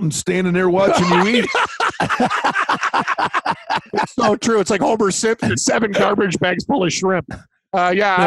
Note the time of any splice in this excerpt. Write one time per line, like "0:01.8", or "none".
0:05.5